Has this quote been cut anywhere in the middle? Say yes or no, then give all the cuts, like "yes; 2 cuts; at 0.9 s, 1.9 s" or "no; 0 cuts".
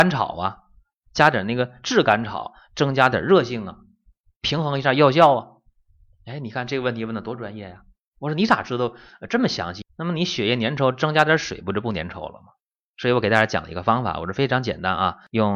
yes; 1 cut; at 9.8 s